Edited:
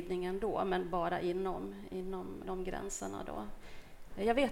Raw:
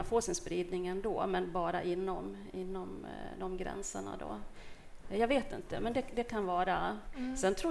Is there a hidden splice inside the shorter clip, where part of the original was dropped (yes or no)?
yes